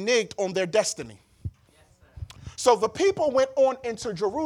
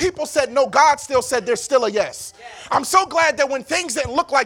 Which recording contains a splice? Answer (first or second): first